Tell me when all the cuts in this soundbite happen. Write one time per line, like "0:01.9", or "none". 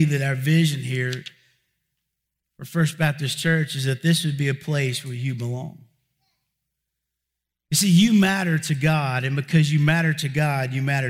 none